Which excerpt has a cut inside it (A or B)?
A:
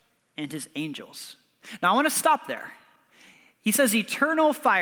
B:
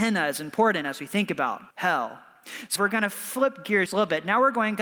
B